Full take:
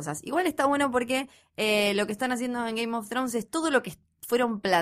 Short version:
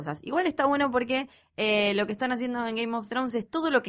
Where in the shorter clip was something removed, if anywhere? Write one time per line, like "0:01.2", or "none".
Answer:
none